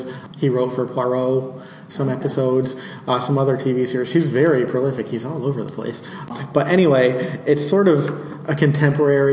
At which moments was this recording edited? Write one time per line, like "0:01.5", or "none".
none

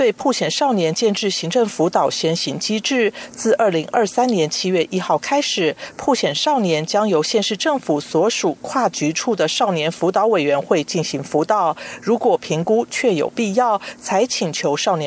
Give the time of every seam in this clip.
none

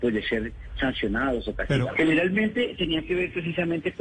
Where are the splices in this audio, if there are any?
0:01.9

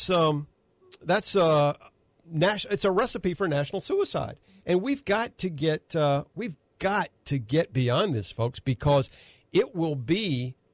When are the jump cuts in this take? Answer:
none

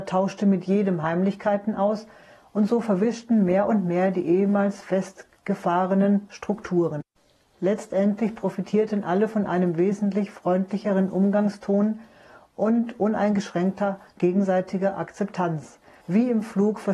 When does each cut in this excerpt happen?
0:16.0

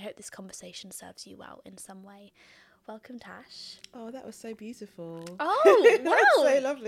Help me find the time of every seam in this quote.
none

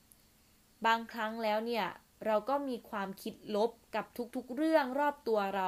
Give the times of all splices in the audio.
0:03.8

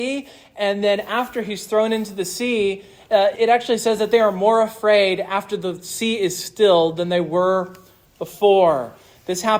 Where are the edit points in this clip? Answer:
0:03.3

